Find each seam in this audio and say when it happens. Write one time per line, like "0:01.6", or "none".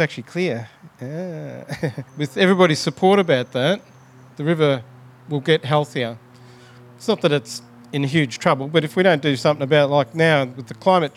0:02.1